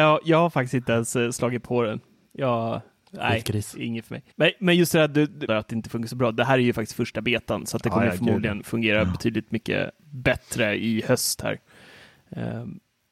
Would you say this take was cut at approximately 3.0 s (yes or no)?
no